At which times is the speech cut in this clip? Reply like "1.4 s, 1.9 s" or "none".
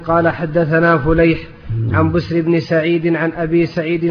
1.9 s